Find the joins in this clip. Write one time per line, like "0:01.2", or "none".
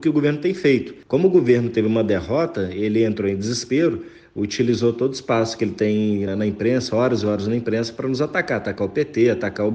0:06.3